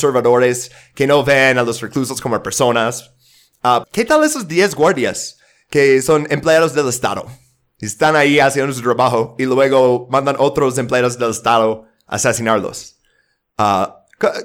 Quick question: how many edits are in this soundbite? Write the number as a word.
one